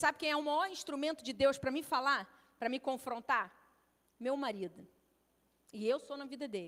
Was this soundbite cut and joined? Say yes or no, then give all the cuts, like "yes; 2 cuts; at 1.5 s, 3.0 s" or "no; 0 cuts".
no; 0 cuts